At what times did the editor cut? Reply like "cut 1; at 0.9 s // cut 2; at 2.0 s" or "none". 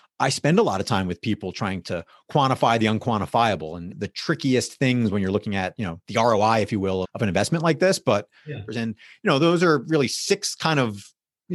cut 1; at 3.9 s // cut 2; at 7.0 s // cut 3; at 8.7 s

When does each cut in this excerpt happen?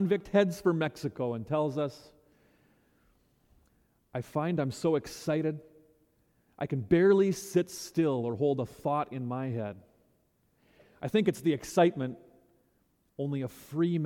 none

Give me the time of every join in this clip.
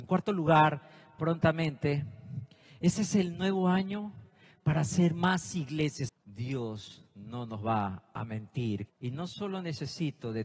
cut 1; at 6.1 s // cut 2; at 8.9 s

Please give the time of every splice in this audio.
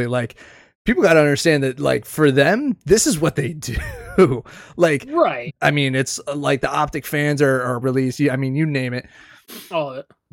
cut 1; at 5.5 s // cut 2; at 7.8 s

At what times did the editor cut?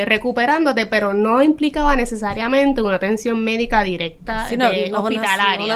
none

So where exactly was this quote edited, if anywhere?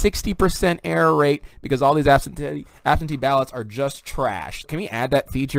cut 1; at 4.6 s

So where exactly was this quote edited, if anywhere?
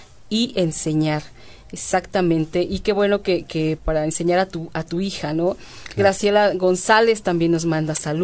cut 1; at 3.8 s

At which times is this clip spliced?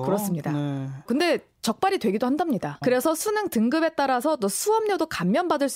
cut 1; at 1.1 s // cut 2; at 2.8 s

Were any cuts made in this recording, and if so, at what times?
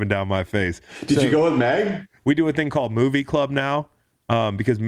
cut 1; at 2.2 s

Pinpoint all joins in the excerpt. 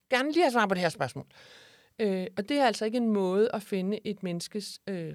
none

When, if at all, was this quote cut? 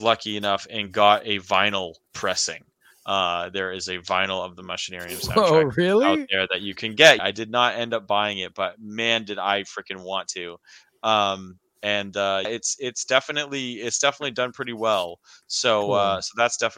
cut 1; at 7.2 s // cut 2; at 12.5 s

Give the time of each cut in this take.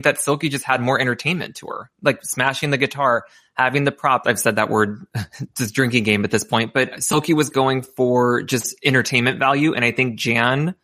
cut 1; at 4.2 s

